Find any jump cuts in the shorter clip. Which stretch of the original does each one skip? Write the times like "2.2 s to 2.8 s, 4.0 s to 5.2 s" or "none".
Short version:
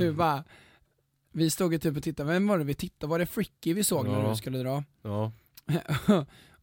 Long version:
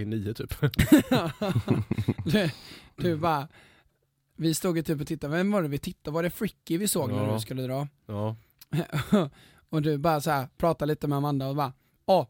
none